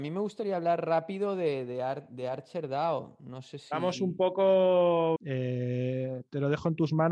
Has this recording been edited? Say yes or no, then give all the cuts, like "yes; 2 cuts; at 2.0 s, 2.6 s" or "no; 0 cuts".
yes; 1 cut; at 5.2 s